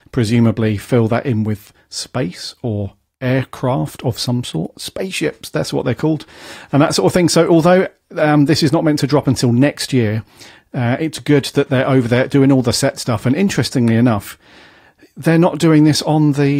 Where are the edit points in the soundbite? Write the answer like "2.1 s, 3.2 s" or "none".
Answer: none